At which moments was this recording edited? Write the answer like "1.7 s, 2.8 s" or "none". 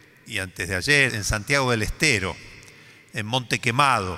1.1 s